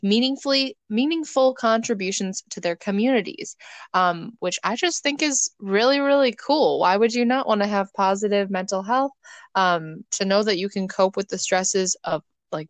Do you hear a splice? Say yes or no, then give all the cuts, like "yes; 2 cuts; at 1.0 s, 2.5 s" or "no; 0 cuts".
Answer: yes; 1 cut; at 10.1 s